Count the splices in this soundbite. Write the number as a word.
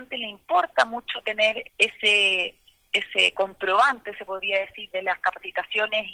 two